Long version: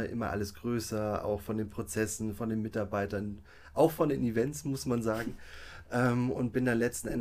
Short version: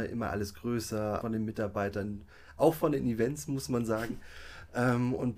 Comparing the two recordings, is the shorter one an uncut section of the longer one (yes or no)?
no